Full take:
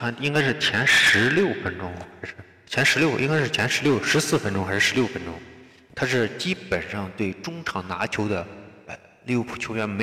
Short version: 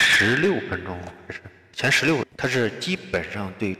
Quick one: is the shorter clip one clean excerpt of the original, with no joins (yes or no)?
no